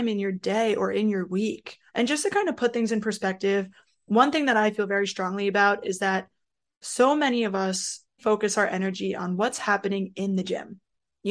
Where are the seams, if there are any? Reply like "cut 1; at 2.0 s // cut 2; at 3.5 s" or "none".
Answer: cut 1; at 1.9 s // cut 2; at 8.2 s